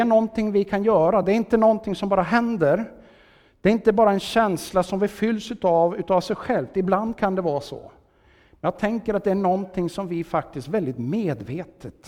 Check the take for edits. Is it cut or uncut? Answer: uncut